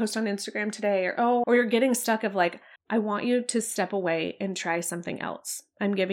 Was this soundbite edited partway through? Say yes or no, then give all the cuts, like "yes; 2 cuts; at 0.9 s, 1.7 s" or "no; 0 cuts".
yes; 2 cuts; at 1.4 s, 2.8 s